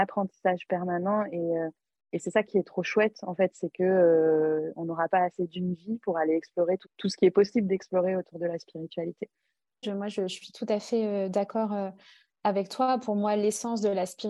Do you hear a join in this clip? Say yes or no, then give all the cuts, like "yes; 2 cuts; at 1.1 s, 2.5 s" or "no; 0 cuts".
yes; 1 cut; at 9.8 s